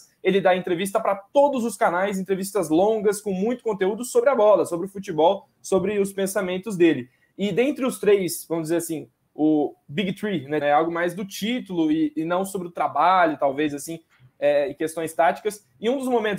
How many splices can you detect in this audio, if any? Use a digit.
1